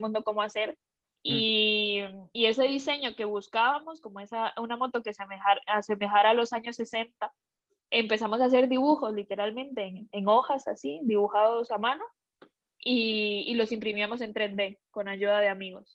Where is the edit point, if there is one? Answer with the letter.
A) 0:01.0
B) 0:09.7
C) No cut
A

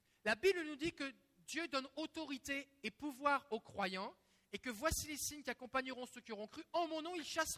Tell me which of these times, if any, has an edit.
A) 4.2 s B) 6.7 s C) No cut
C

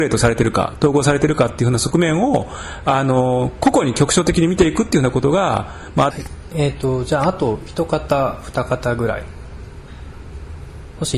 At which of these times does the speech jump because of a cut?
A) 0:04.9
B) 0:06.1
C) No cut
B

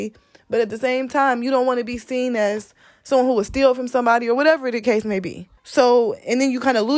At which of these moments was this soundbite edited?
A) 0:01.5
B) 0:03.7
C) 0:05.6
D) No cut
C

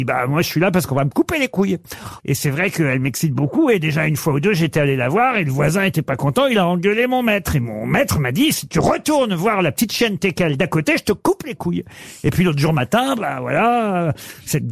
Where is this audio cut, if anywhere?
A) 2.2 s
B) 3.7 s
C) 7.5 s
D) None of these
A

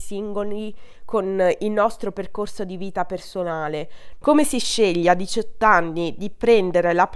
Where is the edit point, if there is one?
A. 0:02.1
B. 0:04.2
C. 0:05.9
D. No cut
B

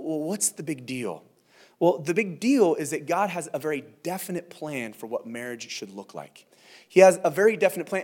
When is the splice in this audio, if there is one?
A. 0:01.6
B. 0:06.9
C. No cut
C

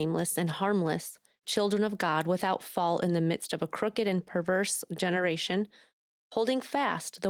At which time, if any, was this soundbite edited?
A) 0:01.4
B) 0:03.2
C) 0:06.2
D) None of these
C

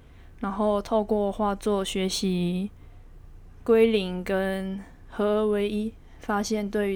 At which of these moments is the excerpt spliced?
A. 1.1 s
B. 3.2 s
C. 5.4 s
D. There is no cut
D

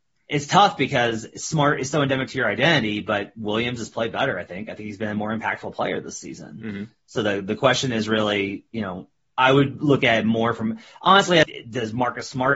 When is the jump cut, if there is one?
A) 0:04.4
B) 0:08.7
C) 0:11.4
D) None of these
C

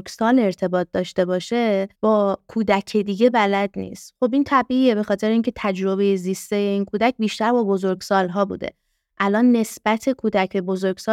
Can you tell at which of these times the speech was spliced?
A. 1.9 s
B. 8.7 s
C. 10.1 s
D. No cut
A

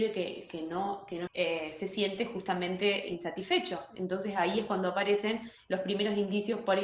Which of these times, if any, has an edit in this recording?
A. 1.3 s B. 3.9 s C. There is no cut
A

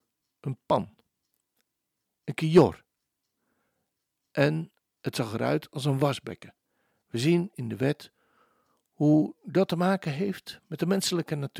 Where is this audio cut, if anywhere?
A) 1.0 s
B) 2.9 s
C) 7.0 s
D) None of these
C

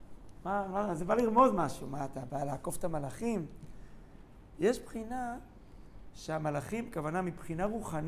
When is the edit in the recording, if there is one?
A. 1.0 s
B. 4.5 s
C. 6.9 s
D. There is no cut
D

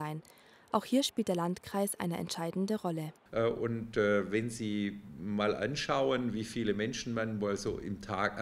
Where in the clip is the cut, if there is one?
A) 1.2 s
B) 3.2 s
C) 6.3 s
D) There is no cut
B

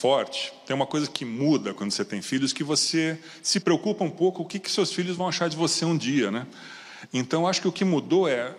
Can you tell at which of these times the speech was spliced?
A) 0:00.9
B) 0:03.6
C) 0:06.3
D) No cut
B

